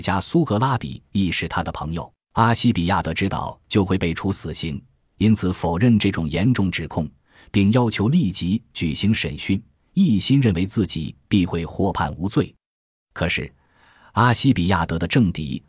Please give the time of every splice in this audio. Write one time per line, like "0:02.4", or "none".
0:02.2
0:03.6